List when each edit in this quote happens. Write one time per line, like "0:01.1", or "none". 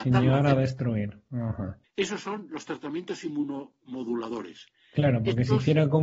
0:01.8